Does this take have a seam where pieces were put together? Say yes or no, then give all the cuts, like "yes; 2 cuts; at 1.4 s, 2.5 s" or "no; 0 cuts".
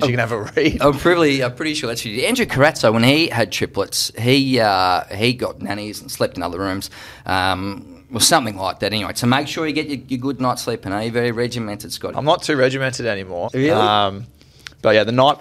yes; 2 cuts; at 12.1 s, 13.5 s